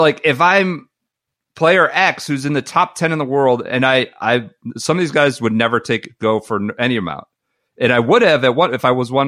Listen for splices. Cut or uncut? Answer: uncut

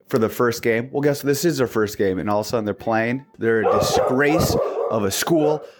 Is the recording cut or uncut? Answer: cut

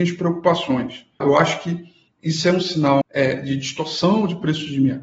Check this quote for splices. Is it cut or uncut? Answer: cut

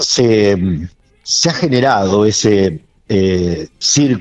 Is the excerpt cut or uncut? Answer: uncut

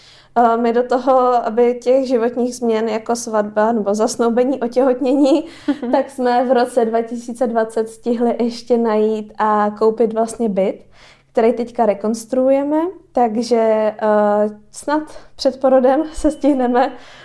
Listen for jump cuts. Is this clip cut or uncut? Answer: uncut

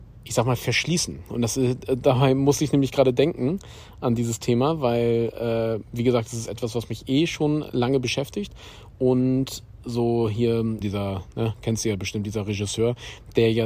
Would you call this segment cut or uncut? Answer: cut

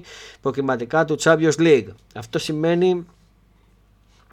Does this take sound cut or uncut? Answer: uncut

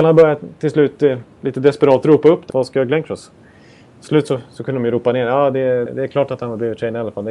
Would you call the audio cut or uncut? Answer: cut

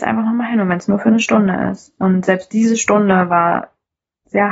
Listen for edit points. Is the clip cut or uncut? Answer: uncut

